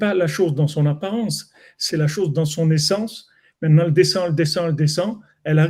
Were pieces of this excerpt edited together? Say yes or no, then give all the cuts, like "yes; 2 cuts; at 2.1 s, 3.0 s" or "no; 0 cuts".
yes; 1 cut; at 1.9 s